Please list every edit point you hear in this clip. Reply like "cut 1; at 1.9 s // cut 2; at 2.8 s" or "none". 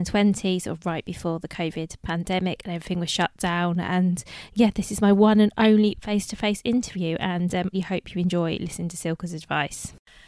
cut 1; at 7.7 s